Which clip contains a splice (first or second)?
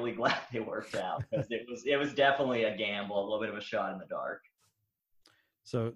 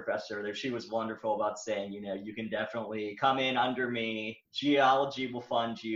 second